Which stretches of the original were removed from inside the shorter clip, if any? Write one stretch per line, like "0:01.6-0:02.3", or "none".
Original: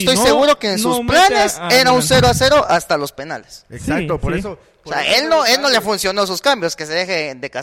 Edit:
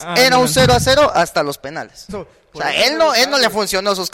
0:03.6-0:04.4